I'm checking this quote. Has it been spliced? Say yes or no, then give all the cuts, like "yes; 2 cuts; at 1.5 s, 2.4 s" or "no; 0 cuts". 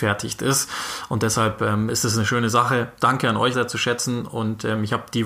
yes; 1 cut; at 3.5 s